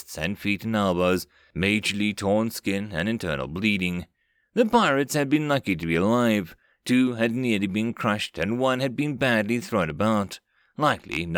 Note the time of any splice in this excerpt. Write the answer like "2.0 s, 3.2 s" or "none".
none